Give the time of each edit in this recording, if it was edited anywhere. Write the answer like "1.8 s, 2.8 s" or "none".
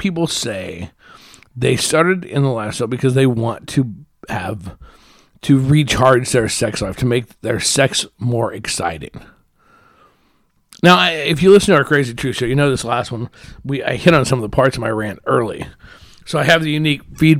none